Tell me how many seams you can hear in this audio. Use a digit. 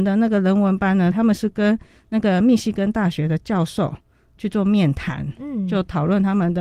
1